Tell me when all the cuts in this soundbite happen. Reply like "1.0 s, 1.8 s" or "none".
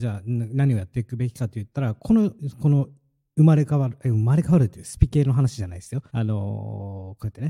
6.1 s